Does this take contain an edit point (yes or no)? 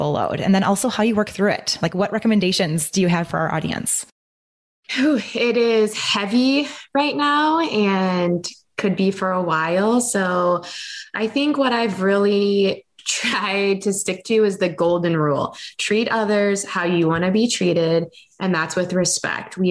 no